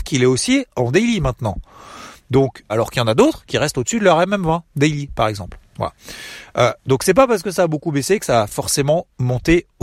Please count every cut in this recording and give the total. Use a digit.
1